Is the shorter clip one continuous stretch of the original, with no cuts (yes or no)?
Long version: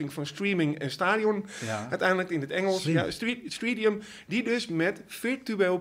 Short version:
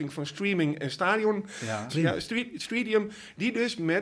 no